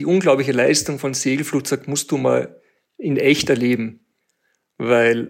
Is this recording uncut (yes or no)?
yes